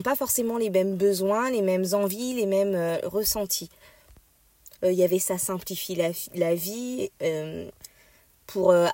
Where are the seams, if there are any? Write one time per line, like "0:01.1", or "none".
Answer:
0:04.8

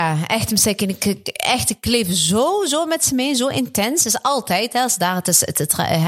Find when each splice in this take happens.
none

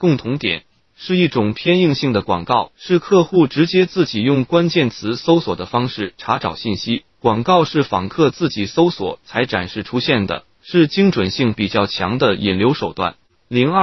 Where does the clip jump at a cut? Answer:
0:02.7

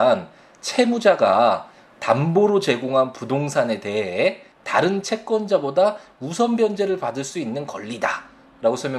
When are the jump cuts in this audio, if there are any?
0:04.5

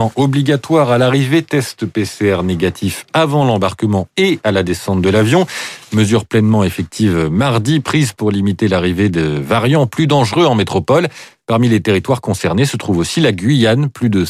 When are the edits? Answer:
none

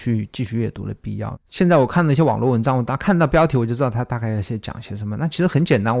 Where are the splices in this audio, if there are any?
0:01.3

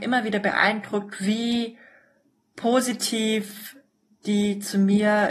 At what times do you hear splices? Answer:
none

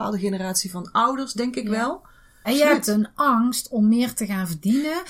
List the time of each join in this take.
0:02.4

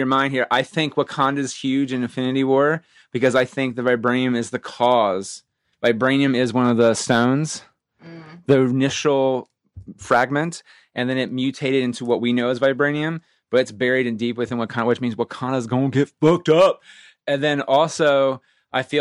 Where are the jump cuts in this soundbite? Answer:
none

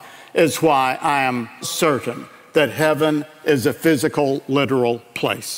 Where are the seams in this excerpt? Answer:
0:01.6

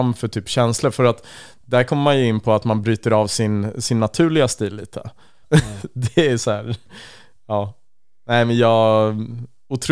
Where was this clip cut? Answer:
0:05.4

